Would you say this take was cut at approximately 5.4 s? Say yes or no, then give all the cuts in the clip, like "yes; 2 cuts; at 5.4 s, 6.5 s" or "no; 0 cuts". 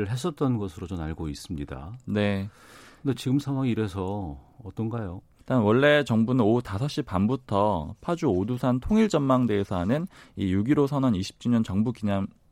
yes; 1 cut; at 5.4 s